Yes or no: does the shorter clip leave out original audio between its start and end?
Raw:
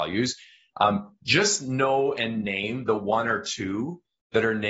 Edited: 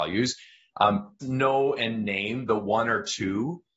yes